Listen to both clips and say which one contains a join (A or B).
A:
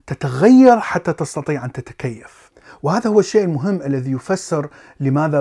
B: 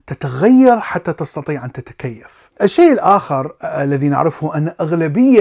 B